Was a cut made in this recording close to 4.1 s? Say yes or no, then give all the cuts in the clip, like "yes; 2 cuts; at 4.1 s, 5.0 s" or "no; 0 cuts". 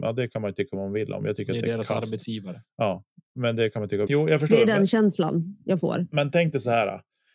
yes; 1 cut; at 4.1 s